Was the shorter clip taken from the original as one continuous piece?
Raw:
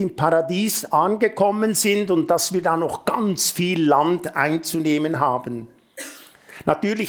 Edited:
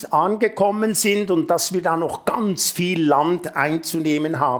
yes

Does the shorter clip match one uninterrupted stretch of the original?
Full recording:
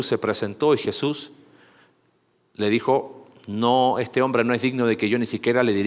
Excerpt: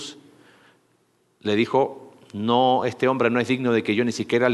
yes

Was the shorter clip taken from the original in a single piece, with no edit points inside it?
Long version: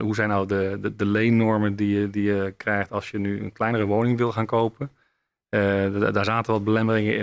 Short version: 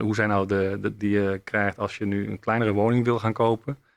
no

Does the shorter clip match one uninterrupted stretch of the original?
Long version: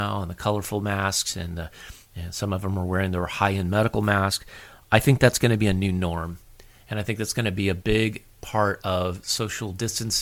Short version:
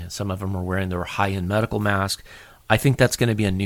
yes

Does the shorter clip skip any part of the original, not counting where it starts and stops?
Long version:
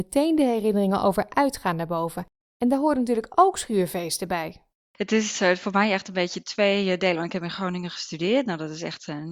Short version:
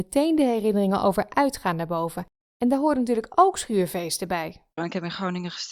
yes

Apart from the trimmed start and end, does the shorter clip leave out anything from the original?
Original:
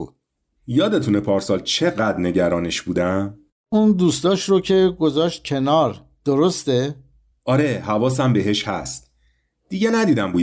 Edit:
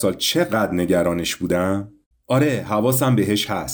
yes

